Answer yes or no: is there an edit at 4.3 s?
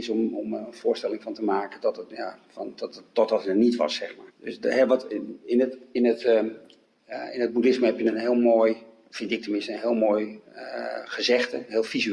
yes